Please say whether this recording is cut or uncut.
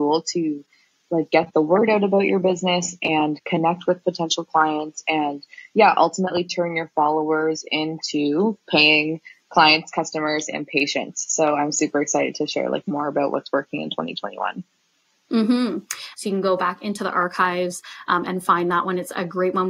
cut